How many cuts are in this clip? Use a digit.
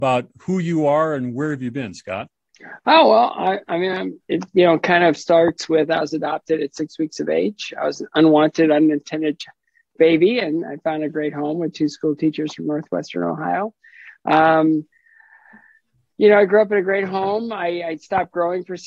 0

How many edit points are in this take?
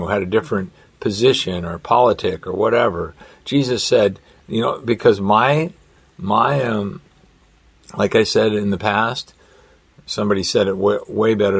0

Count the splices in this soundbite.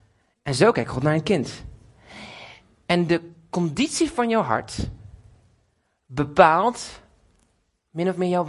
0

